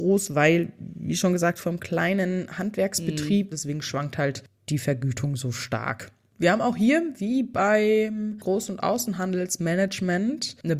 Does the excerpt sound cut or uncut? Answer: cut